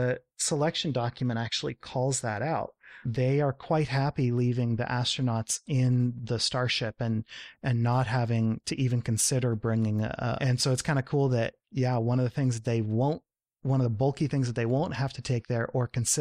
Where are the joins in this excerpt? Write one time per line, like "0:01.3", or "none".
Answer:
0:03.0
0:10.4